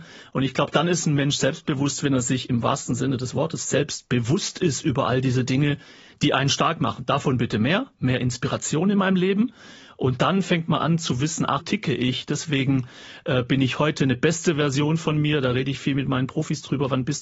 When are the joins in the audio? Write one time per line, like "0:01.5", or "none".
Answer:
0:11.6